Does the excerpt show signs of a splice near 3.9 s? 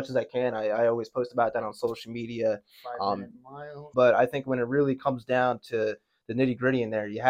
yes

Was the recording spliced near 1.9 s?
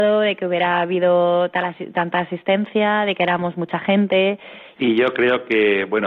no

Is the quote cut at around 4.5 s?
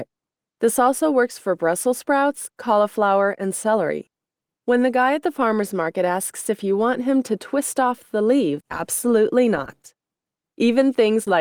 yes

